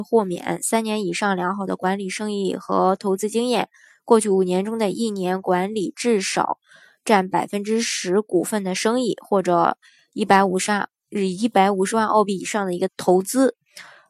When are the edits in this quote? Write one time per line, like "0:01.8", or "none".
0:12.9